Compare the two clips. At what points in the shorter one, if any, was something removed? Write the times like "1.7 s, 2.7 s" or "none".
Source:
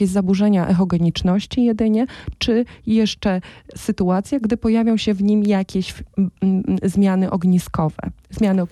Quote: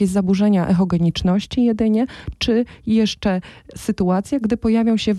none